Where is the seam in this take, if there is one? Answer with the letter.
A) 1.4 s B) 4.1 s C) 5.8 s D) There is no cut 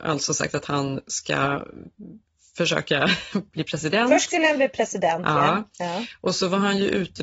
D